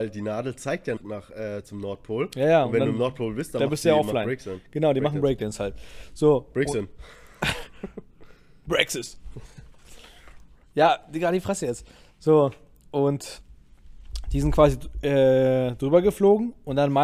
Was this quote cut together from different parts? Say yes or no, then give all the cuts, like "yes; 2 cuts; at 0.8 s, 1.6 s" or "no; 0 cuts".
yes; 1 cut; at 1.0 s